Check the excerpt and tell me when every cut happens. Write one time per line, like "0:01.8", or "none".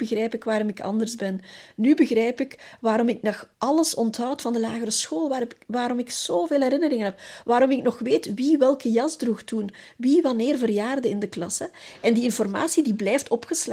none